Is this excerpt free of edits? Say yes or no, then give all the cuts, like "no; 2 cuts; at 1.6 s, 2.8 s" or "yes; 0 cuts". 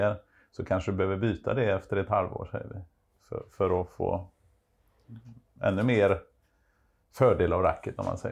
yes; 0 cuts